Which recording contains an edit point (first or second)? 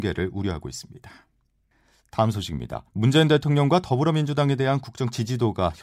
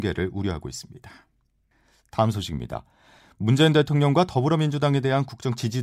first